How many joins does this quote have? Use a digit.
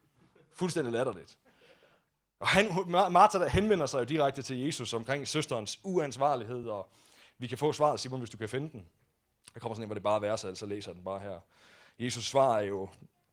0